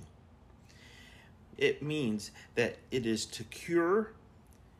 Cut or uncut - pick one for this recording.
cut